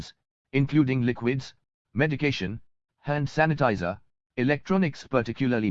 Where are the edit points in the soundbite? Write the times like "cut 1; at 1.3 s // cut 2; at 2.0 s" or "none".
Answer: cut 1; at 4.3 s